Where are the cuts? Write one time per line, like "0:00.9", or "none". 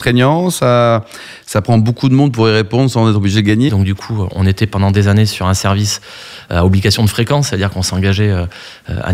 0:03.7